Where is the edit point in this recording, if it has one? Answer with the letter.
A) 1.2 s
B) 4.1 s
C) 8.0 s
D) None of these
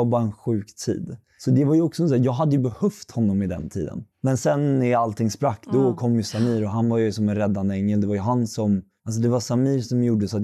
B